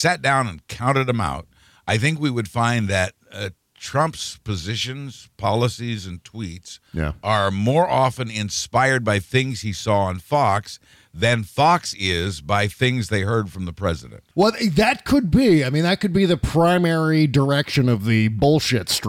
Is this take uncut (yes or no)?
yes